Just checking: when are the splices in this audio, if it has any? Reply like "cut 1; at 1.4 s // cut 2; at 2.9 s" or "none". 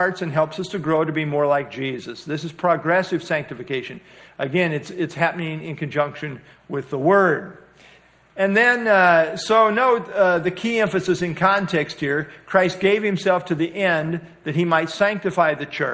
none